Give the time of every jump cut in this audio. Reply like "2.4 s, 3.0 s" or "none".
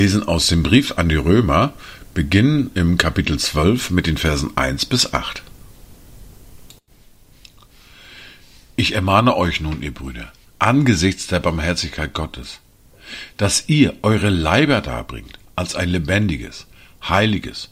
none